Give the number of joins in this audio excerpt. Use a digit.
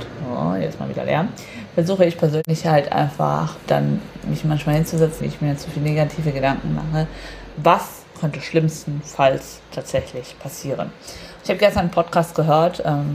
3